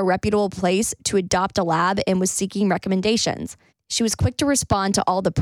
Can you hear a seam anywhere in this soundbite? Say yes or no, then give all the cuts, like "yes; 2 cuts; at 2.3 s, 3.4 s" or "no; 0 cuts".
yes; 1 cut; at 3.7 s